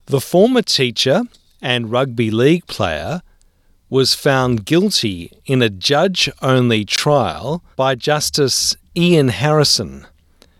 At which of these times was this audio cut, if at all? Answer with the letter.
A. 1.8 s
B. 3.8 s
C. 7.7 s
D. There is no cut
C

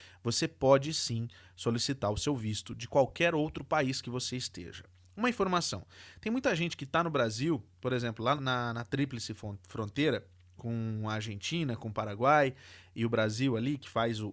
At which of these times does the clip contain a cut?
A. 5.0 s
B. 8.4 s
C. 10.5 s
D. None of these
B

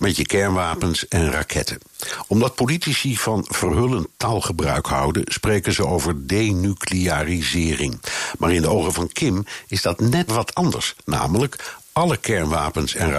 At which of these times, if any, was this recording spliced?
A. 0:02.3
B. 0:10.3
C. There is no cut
B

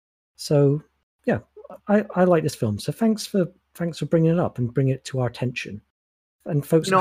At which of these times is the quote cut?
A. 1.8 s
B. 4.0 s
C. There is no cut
A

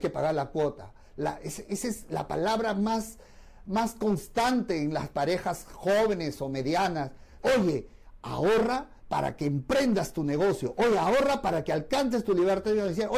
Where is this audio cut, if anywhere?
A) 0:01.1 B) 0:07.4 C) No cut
B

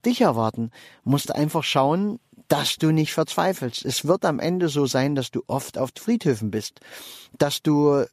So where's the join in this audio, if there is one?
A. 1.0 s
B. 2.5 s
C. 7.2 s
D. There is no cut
B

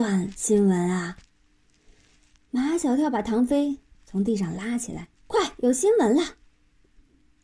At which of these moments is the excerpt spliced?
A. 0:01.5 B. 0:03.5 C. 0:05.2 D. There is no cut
C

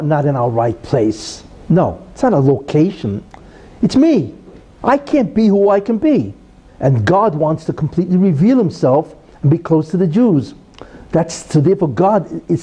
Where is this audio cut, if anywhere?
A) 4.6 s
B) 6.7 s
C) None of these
B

